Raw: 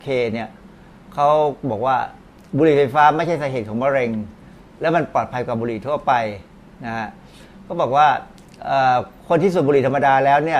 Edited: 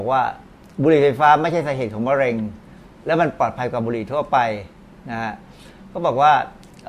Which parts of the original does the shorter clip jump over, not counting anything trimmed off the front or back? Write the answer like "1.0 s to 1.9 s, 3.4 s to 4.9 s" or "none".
none